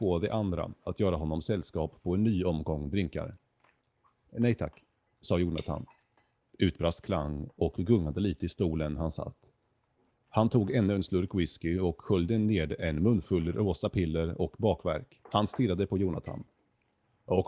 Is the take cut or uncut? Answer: cut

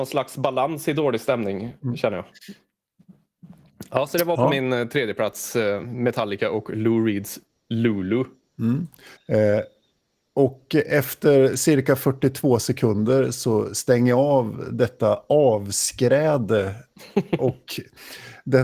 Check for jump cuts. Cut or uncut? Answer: cut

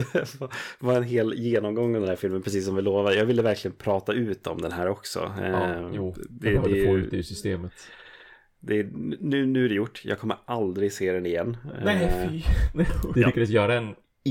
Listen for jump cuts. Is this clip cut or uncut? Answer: cut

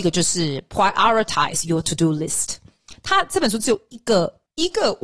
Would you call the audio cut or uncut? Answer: cut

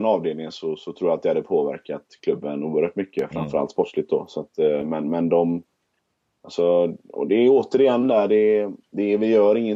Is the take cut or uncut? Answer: uncut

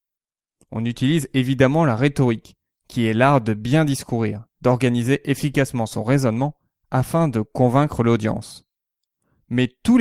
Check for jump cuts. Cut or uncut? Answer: uncut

